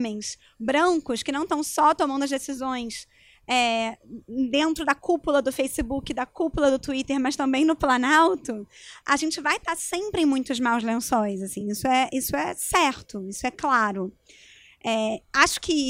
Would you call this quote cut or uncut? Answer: uncut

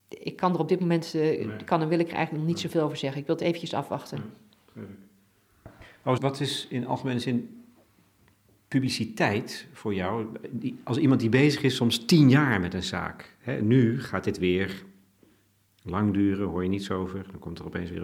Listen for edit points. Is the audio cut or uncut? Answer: cut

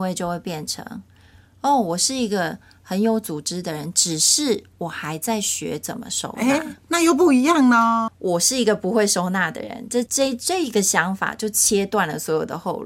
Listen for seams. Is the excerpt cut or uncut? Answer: cut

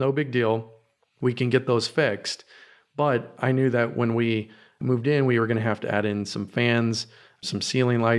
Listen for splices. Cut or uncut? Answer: uncut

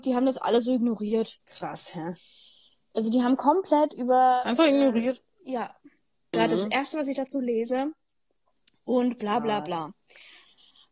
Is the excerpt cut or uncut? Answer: cut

